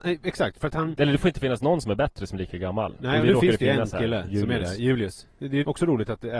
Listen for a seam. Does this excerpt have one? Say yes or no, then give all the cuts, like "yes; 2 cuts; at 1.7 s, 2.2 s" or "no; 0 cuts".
no; 0 cuts